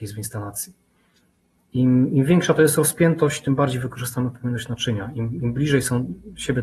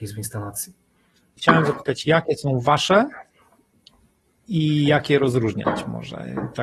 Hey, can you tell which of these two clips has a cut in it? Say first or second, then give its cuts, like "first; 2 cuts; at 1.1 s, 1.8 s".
second; 1 cut; at 1.4 s